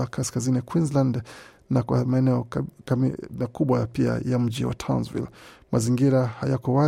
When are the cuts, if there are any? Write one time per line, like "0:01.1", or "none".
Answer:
none

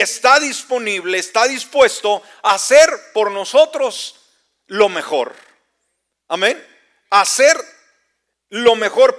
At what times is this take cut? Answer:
none

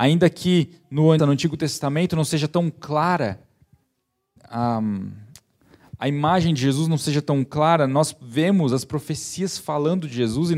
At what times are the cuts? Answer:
0:01.2
0:04.4

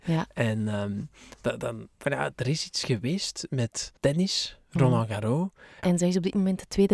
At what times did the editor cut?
0:02.0
0:04.0
0:05.8

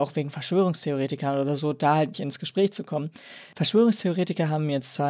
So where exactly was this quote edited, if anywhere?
0:02.1

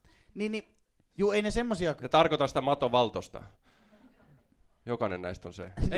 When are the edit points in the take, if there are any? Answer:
none

